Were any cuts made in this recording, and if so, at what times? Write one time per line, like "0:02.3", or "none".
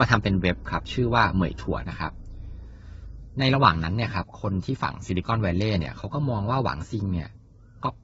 0:01.8